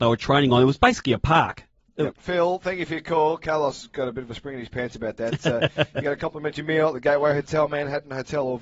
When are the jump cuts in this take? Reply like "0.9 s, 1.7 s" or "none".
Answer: 2.1 s